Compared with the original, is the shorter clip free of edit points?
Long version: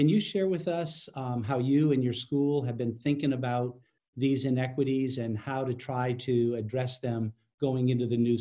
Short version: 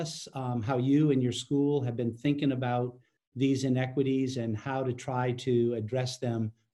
yes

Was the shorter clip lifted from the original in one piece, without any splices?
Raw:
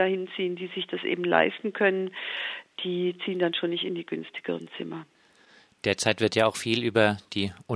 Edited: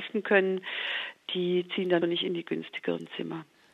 no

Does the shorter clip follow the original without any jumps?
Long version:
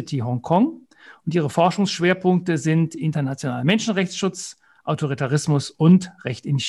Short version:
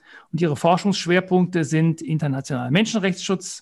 yes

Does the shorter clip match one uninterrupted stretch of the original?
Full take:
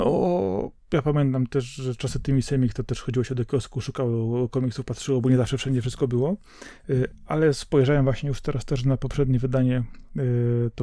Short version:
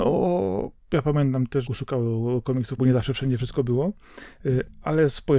no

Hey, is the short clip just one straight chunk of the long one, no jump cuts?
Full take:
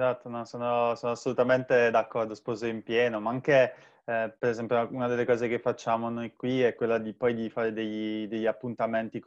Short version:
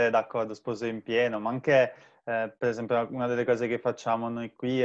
yes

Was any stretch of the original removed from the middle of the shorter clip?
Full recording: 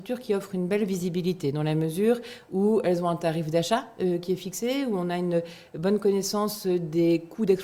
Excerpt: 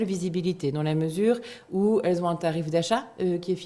no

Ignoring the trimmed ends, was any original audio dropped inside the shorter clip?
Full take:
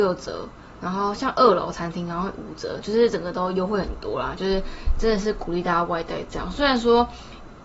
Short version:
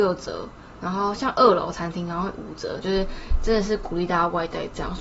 yes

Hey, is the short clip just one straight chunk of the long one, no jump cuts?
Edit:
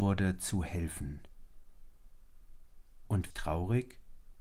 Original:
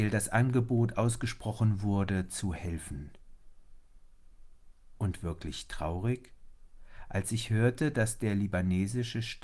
no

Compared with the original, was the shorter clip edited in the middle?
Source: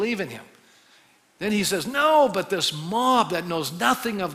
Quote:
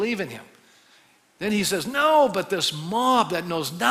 no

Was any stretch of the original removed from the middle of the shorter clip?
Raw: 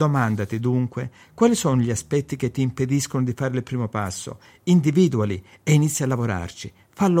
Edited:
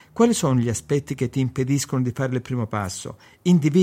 no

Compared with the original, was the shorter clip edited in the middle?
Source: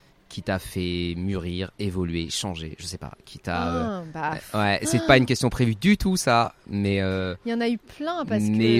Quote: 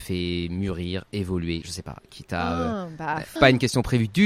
yes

